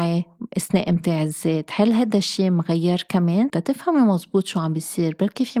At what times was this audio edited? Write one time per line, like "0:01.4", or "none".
0:03.5